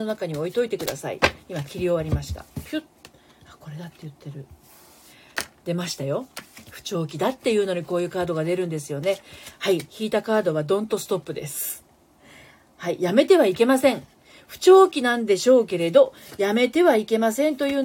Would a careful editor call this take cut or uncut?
uncut